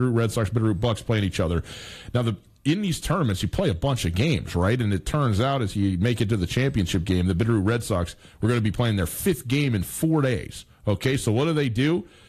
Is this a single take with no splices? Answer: yes; 0 cuts

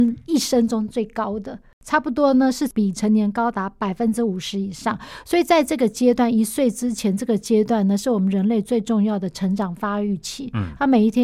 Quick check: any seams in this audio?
no; 0 cuts

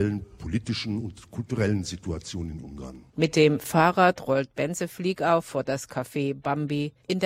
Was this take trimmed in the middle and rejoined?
yes; 1 cut; at 3.1 s

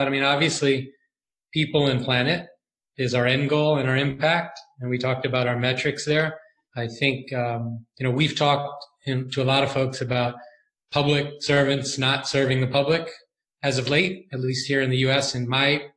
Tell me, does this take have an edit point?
yes; 1 cut; at 6.7 s

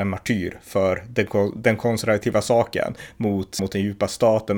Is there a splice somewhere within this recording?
yes; 1 cut; at 3.6 s

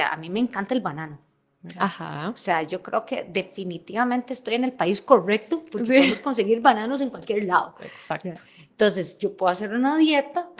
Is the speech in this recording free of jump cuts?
yes; 0 cuts

